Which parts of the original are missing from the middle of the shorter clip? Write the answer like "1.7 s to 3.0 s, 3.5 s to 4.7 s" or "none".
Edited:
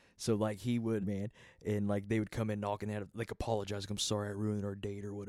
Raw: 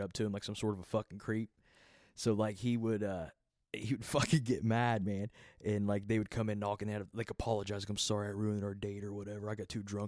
3.0 s to 5.0 s